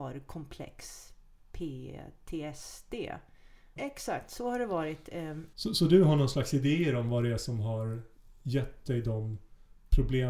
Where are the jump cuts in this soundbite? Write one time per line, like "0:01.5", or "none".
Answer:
0:03.8
0:05.5